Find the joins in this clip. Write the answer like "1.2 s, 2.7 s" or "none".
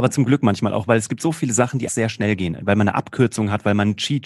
1.9 s